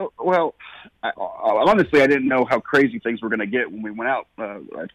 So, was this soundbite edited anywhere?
yes; 1 cut; at 1.1 s

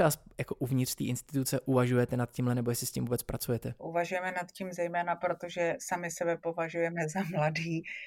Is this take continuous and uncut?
no; 1 cut; at 3.8 s

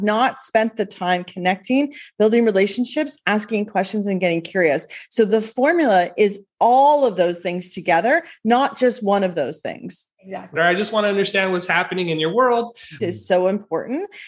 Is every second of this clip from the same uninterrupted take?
no; 2 cuts; at 10.6 s, 13.0 s

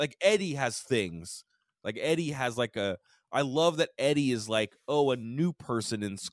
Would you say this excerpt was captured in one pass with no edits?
yes; 0 cuts

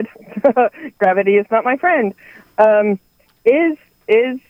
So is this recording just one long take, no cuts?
yes; 0 cuts

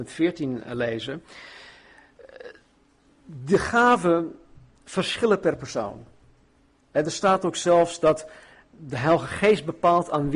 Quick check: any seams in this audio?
no; 0 cuts

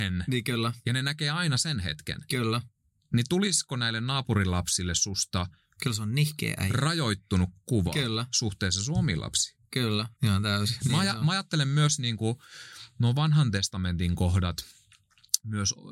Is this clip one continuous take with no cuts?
no; 1 cut; at 10.1 s

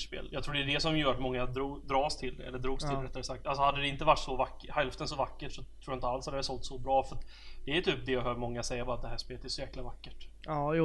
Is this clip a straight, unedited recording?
yes; 0 cuts

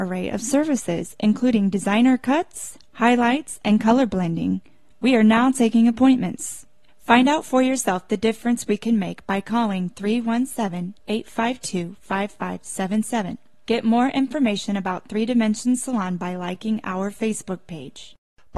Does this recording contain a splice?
no; 0 cuts

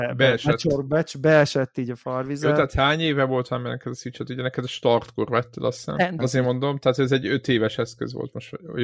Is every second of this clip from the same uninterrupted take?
no; 1 cut; at 6.2 s

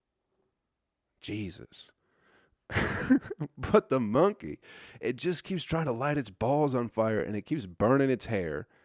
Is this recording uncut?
yes; 0 cuts

